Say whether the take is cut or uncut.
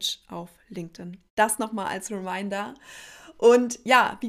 cut